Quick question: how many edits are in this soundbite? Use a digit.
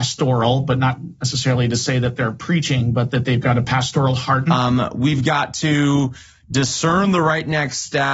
1